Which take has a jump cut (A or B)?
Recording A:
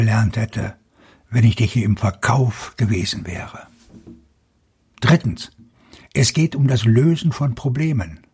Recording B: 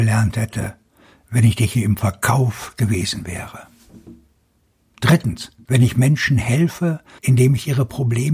B